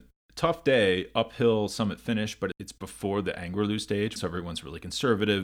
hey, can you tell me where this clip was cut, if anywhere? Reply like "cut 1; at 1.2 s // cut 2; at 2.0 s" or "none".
cut 1; at 2.5 s // cut 2; at 4.2 s